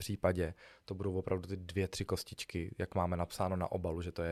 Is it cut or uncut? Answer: uncut